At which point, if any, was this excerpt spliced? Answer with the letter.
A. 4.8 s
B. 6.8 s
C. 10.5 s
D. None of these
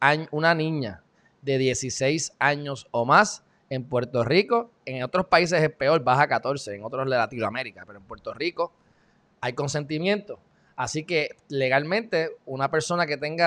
D